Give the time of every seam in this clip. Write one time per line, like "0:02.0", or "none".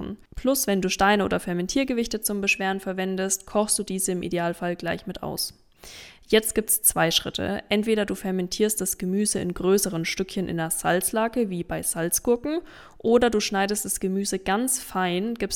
none